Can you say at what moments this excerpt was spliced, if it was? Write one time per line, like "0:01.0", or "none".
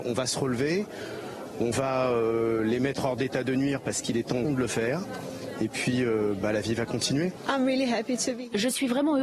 0:04.4